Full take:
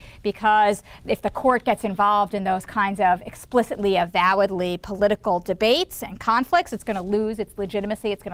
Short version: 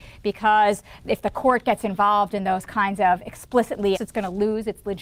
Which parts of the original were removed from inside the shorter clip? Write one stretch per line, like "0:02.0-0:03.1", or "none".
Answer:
0:03.9-0:06.7